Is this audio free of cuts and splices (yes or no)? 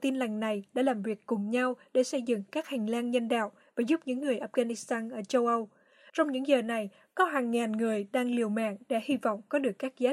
no